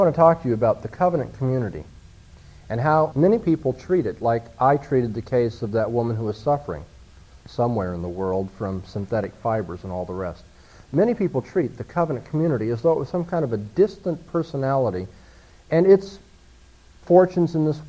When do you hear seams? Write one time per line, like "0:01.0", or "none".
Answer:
0:03.1

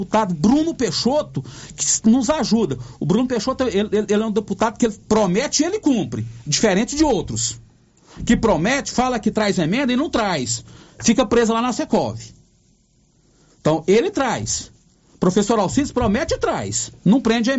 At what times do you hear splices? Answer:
none

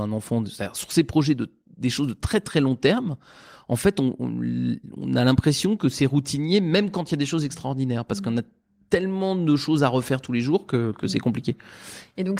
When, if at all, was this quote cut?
none

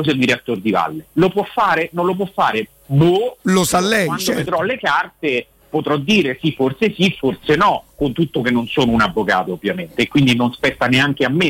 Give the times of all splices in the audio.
none

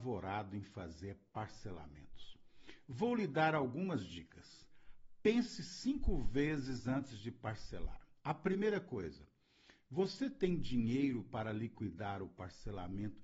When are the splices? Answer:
none

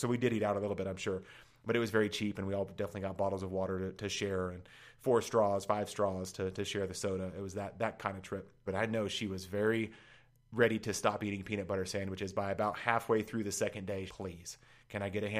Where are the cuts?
0:08.7
0:14.1

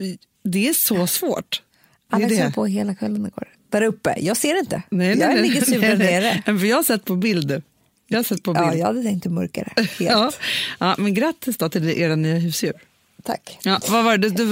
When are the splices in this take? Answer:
none

